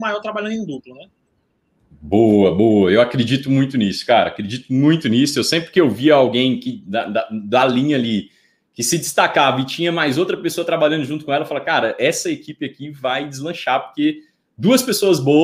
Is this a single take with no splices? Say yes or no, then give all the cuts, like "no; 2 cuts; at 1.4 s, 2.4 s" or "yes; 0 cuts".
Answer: yes; 0 cuts